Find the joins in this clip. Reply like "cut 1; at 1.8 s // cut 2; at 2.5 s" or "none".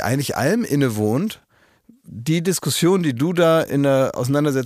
none